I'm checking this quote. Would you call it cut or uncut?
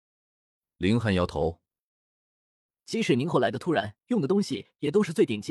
cut